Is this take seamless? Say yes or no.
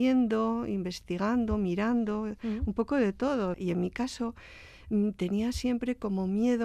no